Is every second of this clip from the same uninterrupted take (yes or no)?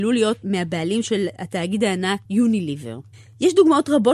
no